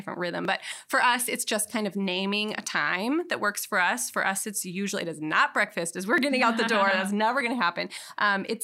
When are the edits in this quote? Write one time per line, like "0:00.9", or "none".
none